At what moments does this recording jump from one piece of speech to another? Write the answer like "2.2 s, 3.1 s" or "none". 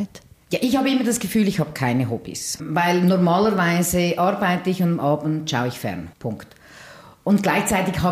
6.1 s